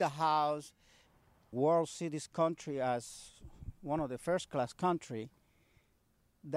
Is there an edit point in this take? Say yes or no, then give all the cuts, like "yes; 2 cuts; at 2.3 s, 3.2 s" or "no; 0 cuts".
yes; 1 cut; at 1.5 s